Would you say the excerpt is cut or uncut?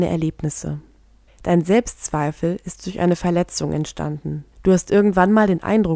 cut